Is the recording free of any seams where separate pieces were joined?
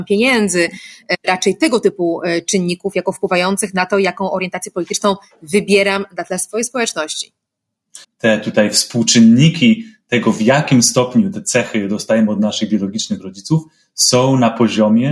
no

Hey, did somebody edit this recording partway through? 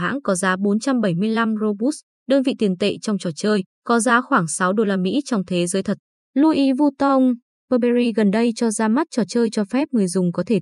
yes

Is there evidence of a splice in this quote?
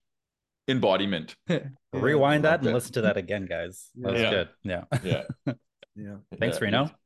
yes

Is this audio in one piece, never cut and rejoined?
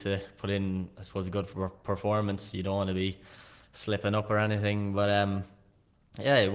yes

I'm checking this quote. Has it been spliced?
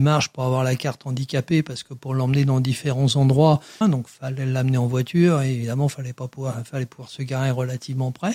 yes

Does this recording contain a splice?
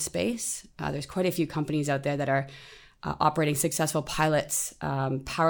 no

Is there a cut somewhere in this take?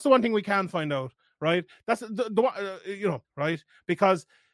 yes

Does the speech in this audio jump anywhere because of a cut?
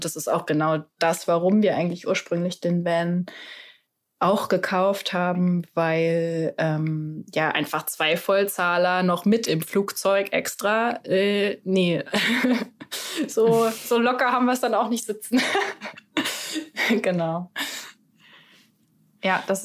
no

